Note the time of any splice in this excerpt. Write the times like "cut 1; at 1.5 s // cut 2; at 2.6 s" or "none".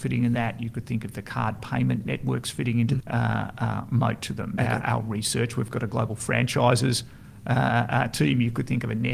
cut 1; at 3.0 s // cut 2; at 4.6 s